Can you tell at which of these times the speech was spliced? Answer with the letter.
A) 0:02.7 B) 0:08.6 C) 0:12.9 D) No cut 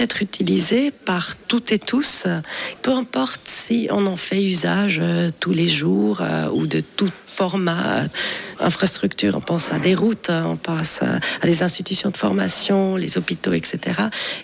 A